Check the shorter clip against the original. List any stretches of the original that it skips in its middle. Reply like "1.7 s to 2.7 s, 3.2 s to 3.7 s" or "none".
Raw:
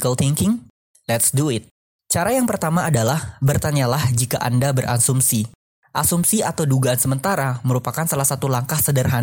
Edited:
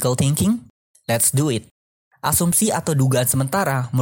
2.0 s to 5.7 s